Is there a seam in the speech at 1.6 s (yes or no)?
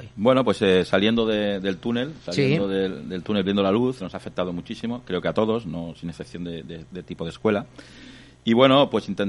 no